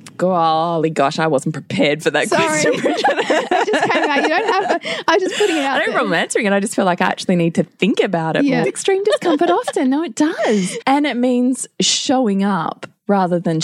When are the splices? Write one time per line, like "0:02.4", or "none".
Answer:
0:08.6
0:10.8